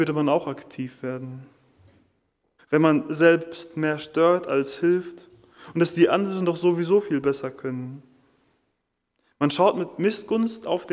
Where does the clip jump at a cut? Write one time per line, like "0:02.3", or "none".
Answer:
0:02.6